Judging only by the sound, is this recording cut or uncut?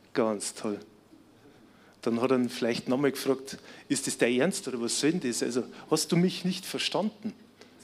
uncut